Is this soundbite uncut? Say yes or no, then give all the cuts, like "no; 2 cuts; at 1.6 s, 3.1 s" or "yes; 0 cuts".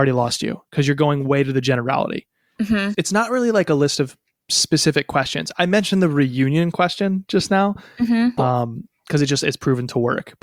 no; 2 cuts; at 2.9 s, 8.4 s